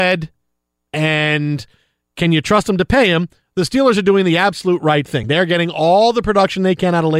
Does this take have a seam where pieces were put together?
no; 0 cuts

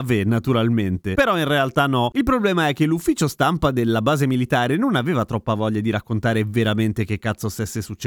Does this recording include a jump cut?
no; 0 cuts

